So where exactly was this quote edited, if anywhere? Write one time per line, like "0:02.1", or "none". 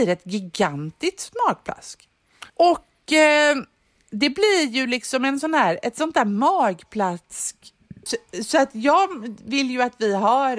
0:02.5
0:08.1